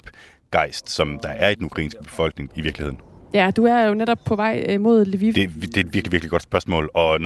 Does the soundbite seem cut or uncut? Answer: cut